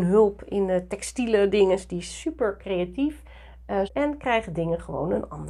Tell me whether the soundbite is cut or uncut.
cut